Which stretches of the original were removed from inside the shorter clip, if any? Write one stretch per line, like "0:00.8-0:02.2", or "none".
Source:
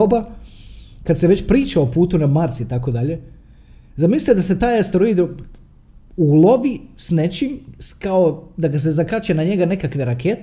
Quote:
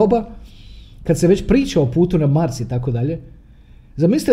none